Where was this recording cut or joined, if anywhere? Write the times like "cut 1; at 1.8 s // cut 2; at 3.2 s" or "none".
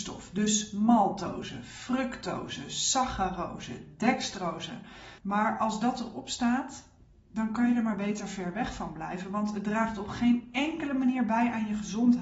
cut 1; at 5.2 s

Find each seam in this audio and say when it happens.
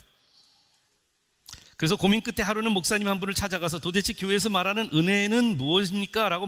none

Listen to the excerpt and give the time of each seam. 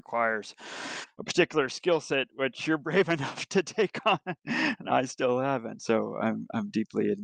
none

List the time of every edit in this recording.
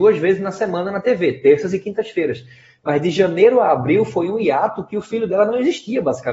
none

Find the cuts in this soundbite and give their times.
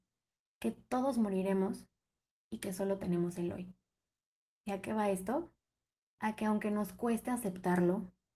none

